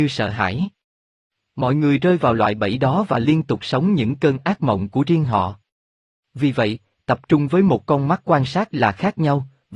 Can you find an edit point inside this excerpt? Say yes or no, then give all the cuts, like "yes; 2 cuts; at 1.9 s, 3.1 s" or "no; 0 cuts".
no; 0 cuts